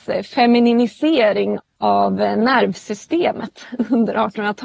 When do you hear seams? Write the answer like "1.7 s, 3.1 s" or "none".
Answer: 1.6 s